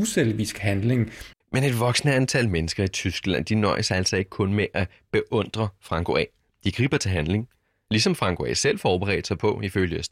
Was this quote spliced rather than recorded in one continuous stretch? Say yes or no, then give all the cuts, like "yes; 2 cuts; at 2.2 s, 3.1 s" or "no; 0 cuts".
yes; 1 cut; at 1.3 s